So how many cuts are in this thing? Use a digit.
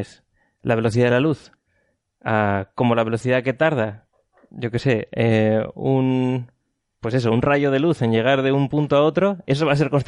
0